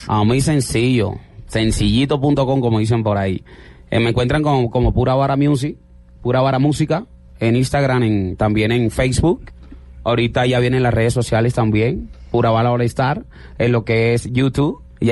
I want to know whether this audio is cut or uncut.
uncut